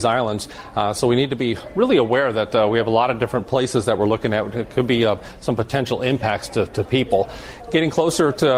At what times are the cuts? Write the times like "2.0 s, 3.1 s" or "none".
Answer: none